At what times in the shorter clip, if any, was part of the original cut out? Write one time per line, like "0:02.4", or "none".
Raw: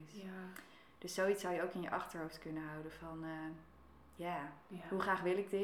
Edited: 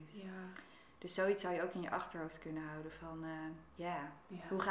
0:03.7